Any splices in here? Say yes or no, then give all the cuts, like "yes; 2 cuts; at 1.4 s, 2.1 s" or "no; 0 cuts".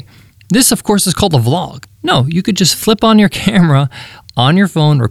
yes; 1 cut; at 1.8 s